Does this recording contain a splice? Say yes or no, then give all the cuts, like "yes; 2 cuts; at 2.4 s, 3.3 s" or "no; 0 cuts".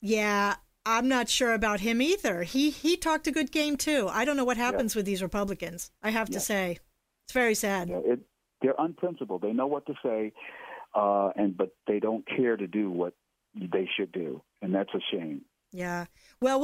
yes; 1 cut; at 6.0 s